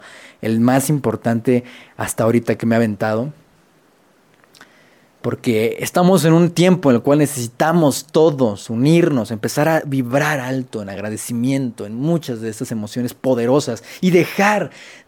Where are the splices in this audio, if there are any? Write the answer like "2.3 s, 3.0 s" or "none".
2.6 s

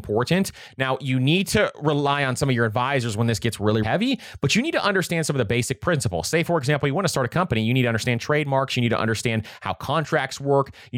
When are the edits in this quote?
3.8 s

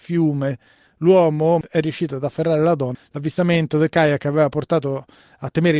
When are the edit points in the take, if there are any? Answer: 1.6 s, 2.9 s

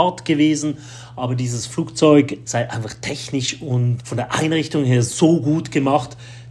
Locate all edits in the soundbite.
2.4 s, 4.0 s

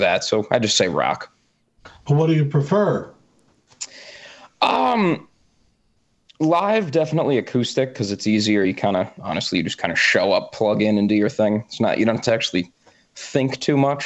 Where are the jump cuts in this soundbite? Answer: none

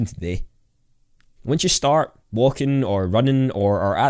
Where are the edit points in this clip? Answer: 1.4 s

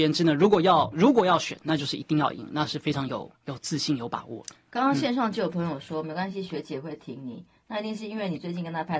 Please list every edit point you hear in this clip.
none

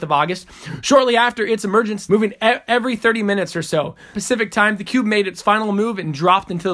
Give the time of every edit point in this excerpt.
2.1 s, 4.1 s

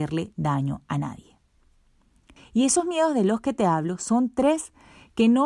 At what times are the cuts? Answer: 2.4 s

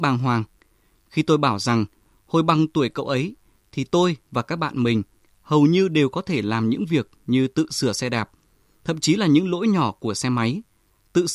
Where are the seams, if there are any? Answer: 0.9 s

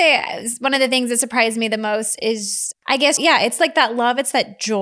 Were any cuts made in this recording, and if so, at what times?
3.2 s

